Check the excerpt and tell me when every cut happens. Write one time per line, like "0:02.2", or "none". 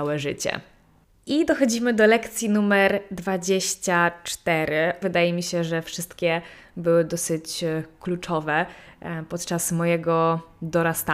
0:05.0